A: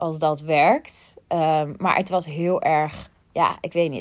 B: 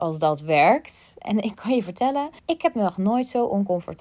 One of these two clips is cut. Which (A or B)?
B